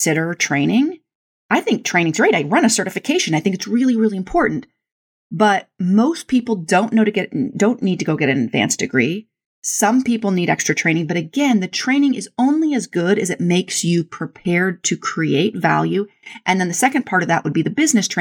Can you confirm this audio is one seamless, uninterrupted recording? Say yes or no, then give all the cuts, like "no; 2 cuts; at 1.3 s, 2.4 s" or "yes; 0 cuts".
yes; 0 cuts